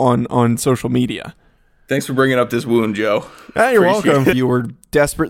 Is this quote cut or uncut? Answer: cut